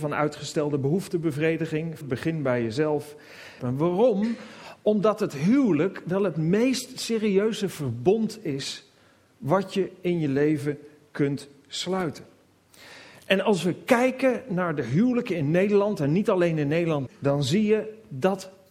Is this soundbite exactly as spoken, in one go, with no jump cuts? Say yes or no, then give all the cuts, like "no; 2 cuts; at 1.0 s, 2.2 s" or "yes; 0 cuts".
no; 3 cuts; at 2.0 s, 3.6 s, 17.1 s